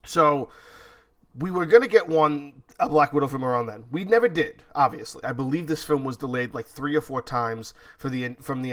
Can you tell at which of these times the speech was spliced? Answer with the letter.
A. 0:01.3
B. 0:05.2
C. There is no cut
B